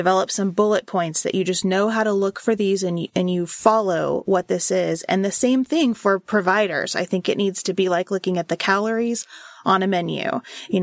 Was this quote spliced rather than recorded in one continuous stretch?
no; 0 cuts

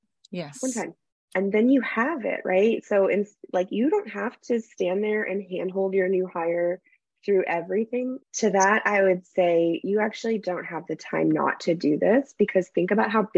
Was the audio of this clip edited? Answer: yes; 2 cuts; at 1.3 s, 8.2 s

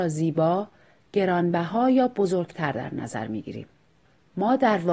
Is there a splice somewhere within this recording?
no; 0 cuts

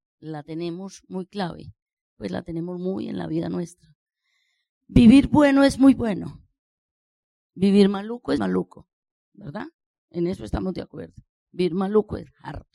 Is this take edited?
yes; 2 cuts; at 8.4 s, 11.4 s

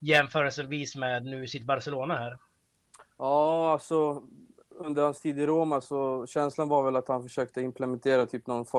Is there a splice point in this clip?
yes; 1 cut; at 3.1 s

